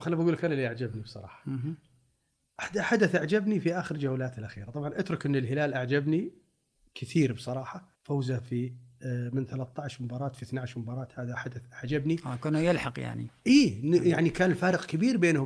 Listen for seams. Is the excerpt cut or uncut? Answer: cut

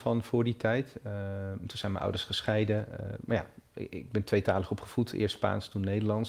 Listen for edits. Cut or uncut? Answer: uncut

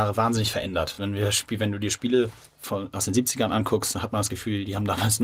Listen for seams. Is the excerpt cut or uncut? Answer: uncut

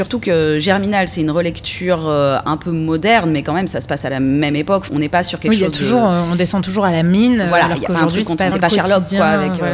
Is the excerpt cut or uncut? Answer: cut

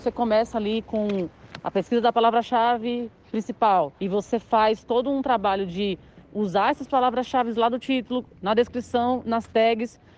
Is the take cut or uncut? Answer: cut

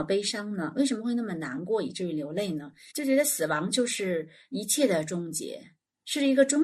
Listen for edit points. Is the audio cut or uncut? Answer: cut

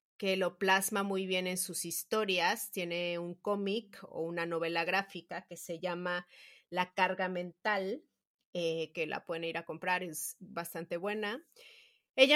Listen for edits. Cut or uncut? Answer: uncut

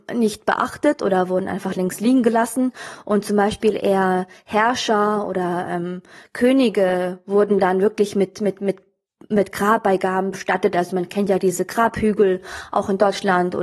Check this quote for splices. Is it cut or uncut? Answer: uncut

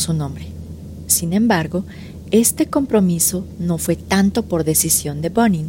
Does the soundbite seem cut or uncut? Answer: uncut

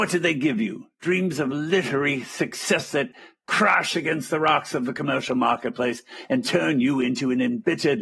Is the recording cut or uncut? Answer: uncut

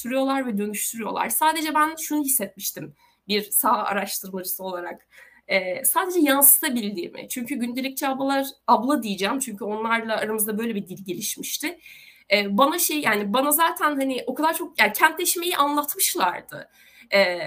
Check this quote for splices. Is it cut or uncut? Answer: uncut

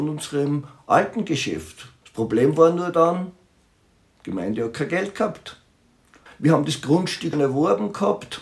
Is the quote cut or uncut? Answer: cut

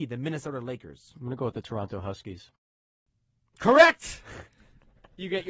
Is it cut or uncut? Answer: uncut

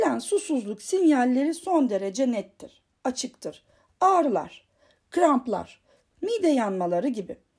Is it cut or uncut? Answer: cut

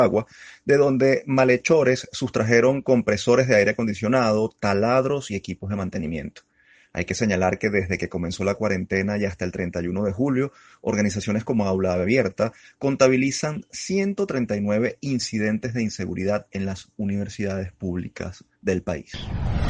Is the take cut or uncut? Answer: uncut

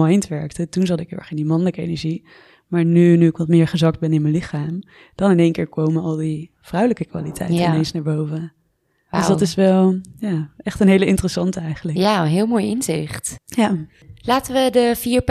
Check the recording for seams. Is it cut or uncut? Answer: uncut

